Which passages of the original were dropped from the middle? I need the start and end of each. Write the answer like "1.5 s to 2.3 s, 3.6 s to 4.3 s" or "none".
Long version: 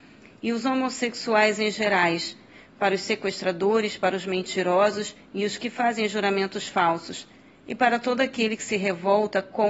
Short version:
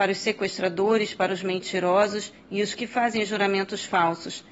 none